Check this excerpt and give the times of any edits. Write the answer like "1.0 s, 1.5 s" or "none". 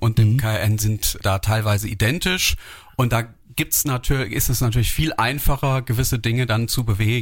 1.2 s